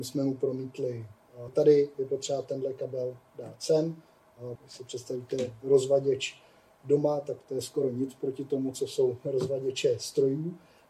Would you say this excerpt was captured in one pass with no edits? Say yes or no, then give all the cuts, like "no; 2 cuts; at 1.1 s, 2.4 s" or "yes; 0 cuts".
no; 2 cuts; at 1.5 s, 4.6 s